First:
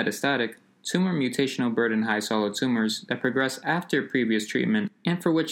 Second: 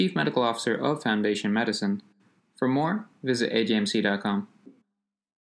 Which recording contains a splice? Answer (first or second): second